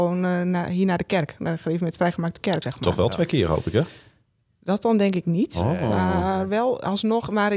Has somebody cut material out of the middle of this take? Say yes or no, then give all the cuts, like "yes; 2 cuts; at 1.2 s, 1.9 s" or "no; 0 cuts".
yes; 1 cut; at 2.6 s